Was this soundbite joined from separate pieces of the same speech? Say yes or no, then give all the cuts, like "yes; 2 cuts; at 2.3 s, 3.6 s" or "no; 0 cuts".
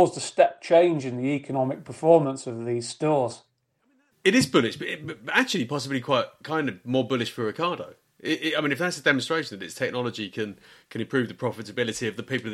yes; 1 cut; at 4.1 s